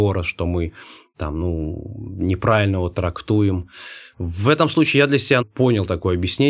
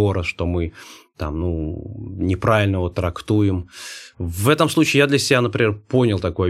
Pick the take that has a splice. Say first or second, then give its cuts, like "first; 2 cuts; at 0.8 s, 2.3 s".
first; 1 cut; at 5.4 s